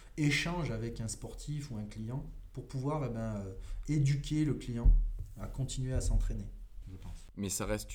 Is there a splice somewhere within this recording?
yes; 1 cut; at 6.8 s

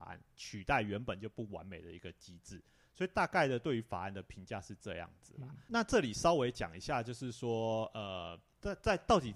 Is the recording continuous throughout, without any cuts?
yes; 0 cuts

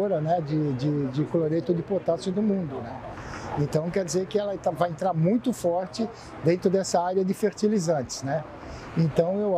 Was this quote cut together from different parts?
no; 0 cuts

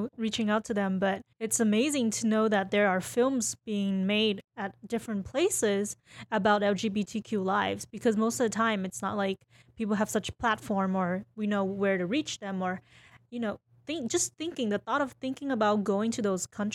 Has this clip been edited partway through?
yes; 1 cut; at 1.3 s

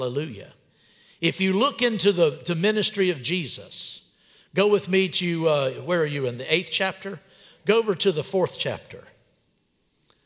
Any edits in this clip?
no; 0 cuts

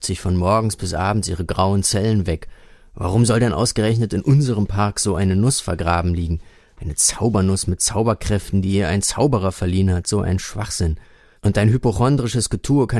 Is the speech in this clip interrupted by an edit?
no; 0 cuts

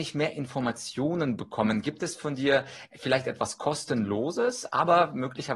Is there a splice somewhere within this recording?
no; 0 cuts

